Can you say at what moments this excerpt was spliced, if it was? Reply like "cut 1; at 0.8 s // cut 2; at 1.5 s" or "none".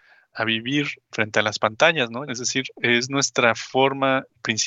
cut 1; at 2.3 s